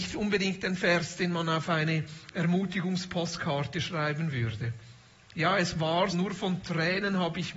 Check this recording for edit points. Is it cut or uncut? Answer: cut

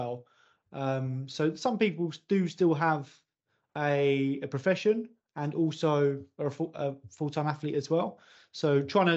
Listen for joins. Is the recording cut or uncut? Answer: uncut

